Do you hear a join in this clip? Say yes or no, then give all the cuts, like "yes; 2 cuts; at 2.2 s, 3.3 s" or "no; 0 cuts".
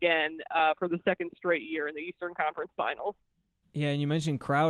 no; 0 cuts